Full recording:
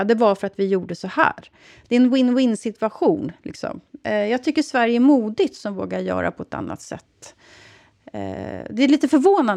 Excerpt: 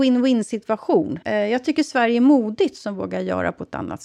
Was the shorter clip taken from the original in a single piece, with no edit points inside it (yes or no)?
no